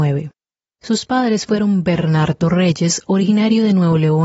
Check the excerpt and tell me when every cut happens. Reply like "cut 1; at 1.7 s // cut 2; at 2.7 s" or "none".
none